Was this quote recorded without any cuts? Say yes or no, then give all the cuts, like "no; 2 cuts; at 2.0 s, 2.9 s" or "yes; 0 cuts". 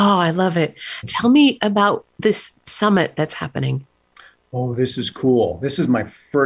no; 1 cut; at 1.0 s